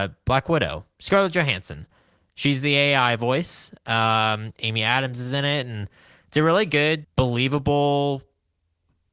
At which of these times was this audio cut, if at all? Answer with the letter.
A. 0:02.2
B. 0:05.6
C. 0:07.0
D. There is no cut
C